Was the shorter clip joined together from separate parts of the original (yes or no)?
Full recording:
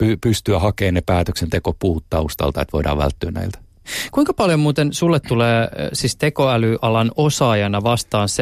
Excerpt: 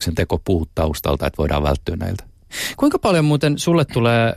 no